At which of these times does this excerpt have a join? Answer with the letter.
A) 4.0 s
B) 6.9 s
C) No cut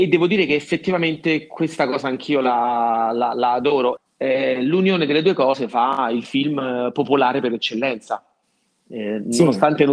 A